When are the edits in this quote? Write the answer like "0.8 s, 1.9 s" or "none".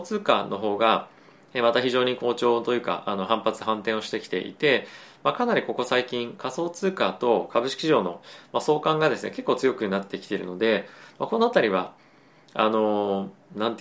none